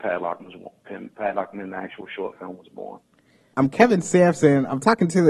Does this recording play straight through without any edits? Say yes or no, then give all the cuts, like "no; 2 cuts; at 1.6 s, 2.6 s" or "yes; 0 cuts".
no; 1 cut; at 3.5 s